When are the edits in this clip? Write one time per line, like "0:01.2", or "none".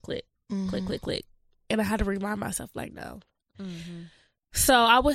none